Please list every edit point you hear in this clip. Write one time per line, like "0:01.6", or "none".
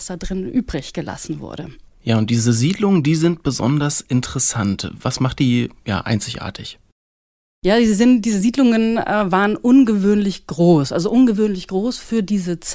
0:05.0